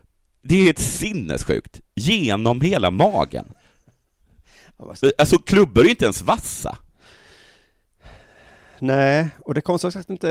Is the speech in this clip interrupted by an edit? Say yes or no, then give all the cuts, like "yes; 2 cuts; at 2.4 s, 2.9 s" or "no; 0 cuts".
no; 0 cuts